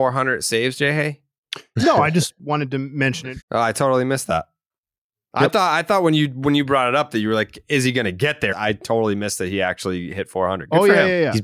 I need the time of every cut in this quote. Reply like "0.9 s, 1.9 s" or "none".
3.4 s, 8.5 s